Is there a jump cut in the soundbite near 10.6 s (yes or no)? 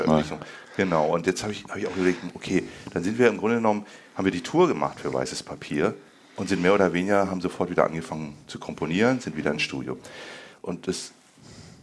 yes